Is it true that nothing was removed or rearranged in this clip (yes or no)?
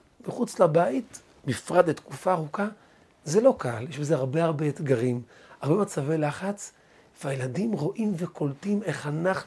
yes